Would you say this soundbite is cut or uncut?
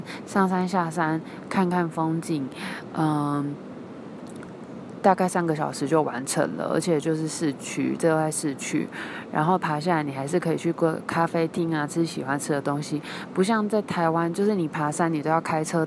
uncut